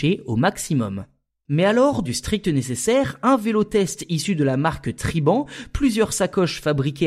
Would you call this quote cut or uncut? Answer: cut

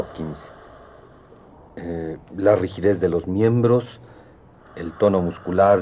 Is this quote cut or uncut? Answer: uncut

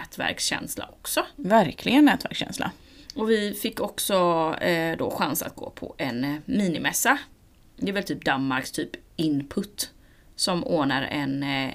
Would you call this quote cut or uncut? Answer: uncut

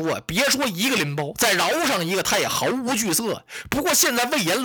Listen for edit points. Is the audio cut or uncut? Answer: uncut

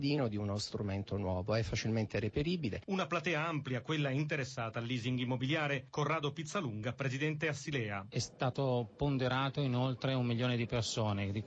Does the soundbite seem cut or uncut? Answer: uncut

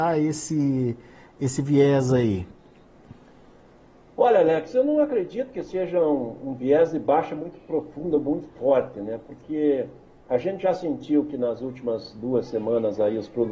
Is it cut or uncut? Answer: uncut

